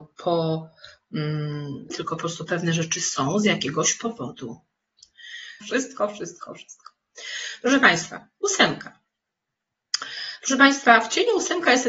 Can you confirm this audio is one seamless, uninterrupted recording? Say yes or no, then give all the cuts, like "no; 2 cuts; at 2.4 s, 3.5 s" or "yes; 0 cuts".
no; 2 cuts; at 1.9 s, 5.6 s